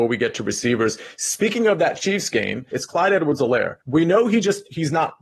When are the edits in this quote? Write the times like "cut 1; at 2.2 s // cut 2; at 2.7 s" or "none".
cut 1; at 2.7 s // cut 2; at 3.8 s